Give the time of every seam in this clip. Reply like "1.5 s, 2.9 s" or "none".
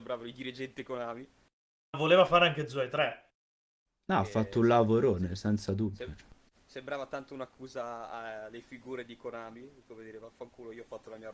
1.9 s, 3.9 s